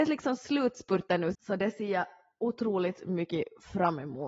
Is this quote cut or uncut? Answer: cut